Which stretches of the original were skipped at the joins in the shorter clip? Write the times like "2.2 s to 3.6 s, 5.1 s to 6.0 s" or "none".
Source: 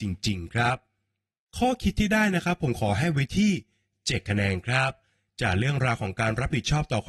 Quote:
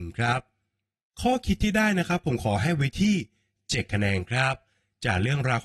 none